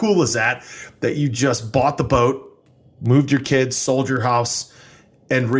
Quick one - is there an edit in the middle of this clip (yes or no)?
no